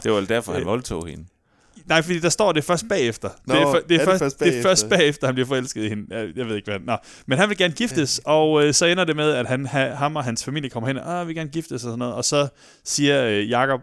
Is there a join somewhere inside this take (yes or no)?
no